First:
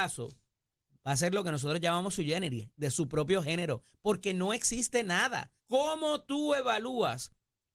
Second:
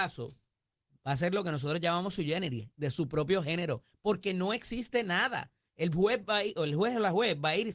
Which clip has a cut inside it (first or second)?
first